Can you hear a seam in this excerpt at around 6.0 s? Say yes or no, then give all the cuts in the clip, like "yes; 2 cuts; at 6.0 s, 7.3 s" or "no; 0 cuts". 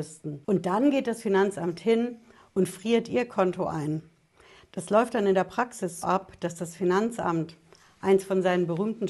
yes; 1 cut; at 6.0 s